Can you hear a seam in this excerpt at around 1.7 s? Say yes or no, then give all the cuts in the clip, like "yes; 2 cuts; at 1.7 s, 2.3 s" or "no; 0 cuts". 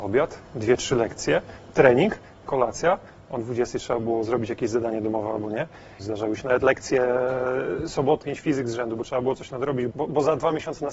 no; 3 cuts; at 6.0 s, 8.2 s, 9.9 s